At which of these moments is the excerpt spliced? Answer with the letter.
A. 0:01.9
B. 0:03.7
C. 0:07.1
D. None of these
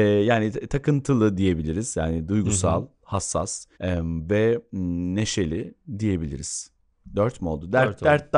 B